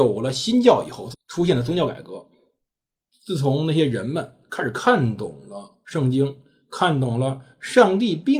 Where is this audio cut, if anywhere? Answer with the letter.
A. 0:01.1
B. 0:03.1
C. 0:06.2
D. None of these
A